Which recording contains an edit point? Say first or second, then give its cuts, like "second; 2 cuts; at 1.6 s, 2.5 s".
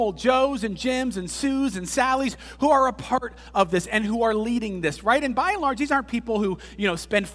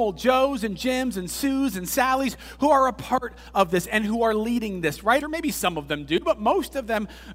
second; 1 cut; at 5.2 s